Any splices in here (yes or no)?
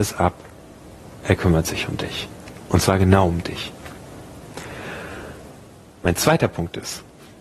no